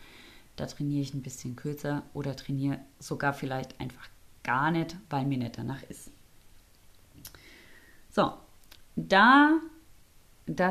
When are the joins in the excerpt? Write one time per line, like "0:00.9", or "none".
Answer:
none